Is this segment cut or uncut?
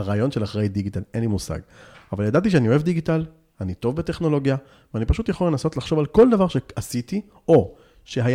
uncut